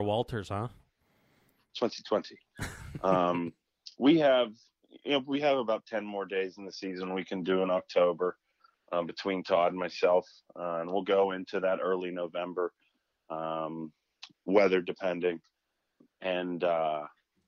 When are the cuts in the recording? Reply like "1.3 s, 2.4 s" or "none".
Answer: none

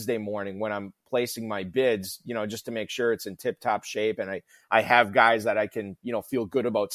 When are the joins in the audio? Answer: none

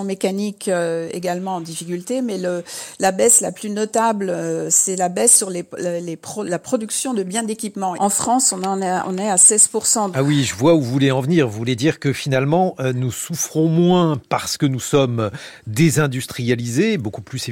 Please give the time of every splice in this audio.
7.9 s, 10.1 s

